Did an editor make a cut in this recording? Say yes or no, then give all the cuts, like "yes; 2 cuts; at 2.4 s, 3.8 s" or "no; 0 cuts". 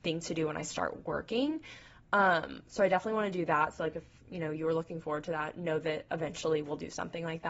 no; 0 cuts